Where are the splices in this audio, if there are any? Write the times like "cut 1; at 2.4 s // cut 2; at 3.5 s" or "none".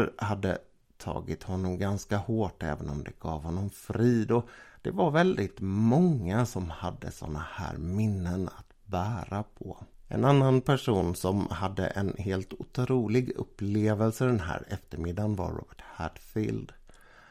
none